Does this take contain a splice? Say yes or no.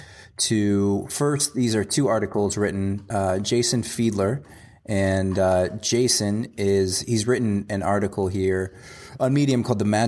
no